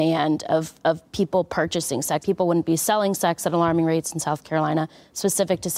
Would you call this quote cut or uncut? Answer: cut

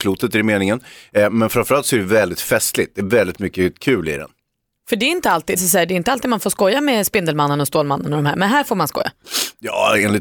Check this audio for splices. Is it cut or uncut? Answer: cut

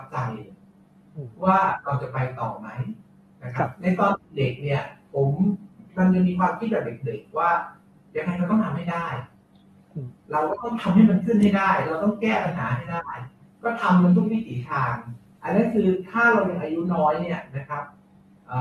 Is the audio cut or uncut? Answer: uncut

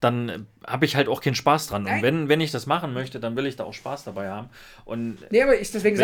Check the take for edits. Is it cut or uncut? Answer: uncut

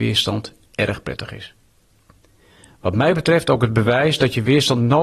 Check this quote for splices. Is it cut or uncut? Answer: uncut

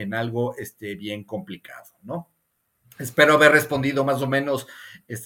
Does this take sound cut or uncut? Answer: uncut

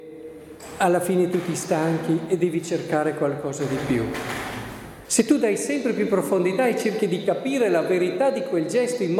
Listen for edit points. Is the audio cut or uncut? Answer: cut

